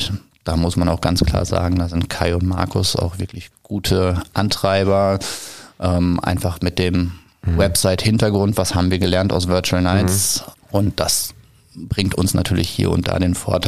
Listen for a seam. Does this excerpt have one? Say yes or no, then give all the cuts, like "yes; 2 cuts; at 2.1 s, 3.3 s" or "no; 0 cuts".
yes; 1 cut; at 10.5 s